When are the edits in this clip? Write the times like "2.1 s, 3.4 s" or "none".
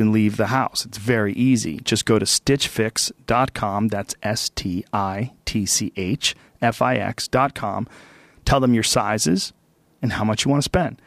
10.0 s